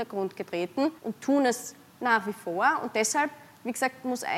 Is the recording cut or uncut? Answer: cut